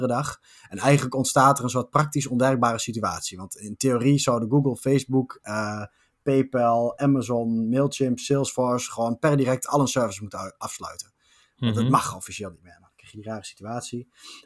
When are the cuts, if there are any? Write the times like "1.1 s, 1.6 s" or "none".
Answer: none